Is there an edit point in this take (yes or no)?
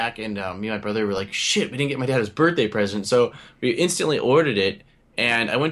no